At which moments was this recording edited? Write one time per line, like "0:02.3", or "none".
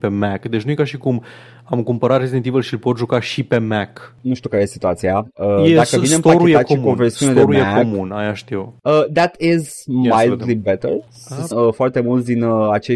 0:11.5